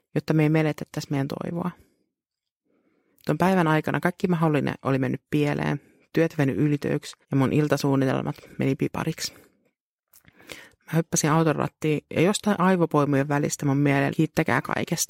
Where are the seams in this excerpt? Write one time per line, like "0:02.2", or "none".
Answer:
0:03.1
0:07.2
0:14.1